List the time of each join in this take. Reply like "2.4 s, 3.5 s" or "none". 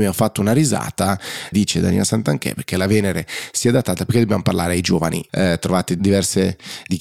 1.5 s, 5.3 s